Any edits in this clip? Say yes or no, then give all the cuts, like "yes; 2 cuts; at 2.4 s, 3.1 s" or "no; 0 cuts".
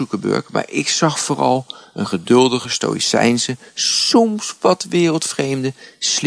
no; 0 cuts